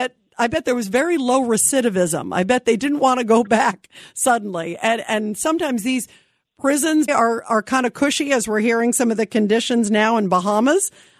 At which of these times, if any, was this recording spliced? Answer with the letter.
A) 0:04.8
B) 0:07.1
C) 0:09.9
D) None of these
B